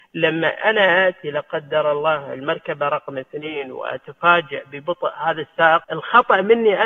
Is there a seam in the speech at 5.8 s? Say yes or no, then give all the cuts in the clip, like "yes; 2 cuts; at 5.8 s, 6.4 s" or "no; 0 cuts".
yes; 1 cut; at 5.8 s